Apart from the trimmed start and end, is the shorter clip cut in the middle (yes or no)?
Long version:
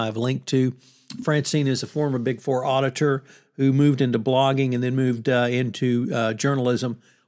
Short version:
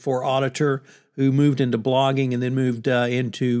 no